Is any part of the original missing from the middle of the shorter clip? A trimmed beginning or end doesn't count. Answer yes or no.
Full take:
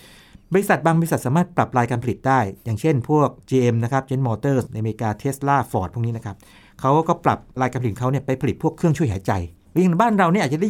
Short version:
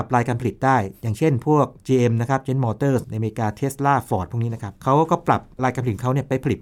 yes